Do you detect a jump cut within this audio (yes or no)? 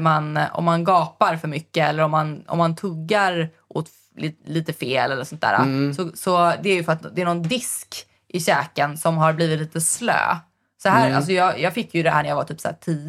no